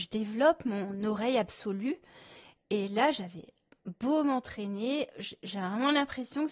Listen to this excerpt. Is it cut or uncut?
uncut